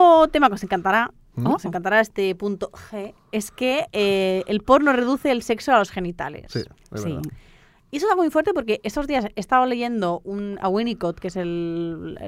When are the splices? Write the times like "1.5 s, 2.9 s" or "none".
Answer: none